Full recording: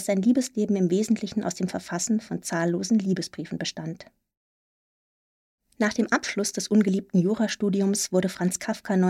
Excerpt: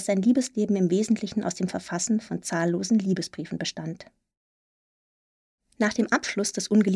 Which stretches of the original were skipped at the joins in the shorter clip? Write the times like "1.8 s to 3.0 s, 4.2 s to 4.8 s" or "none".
none